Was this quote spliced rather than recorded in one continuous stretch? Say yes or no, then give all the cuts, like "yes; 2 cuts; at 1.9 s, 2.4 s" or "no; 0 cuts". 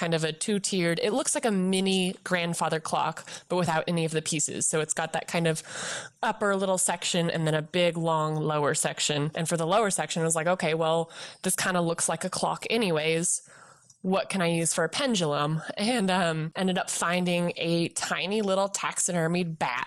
yes; 1 cut; at 9.3 s